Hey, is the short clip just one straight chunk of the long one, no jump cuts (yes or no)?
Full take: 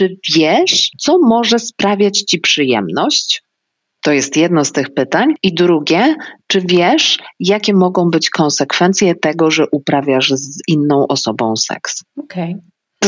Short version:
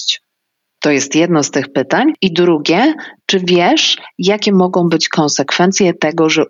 yes